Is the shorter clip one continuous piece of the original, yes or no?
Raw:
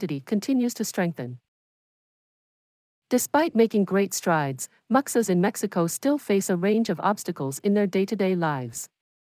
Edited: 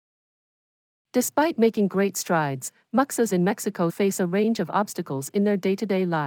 no